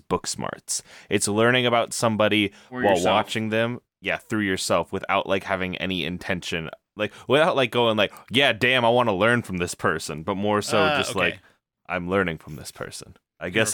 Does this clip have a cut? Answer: no; 0 cuts

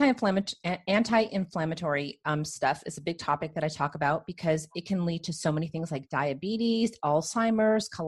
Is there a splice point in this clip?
no; 0 cuts

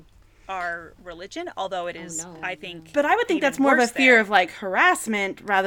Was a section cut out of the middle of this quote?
no; 0 cuts

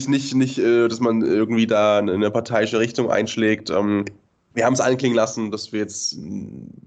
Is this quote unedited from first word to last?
yes; 0 cuts

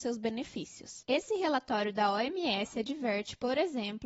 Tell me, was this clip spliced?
no; 0 cuts

